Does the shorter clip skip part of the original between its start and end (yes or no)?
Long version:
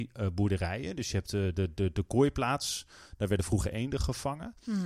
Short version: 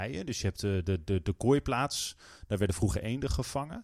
no